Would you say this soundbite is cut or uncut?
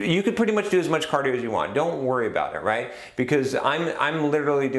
uncut